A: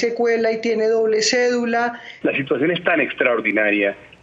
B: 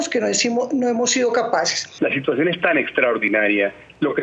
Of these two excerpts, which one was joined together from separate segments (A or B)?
A